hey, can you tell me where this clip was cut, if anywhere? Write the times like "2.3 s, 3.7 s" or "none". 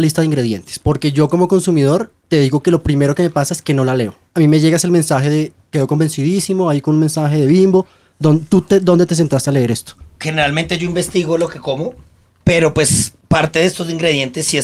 none